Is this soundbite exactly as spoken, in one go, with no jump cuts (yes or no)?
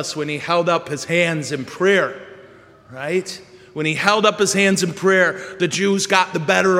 yes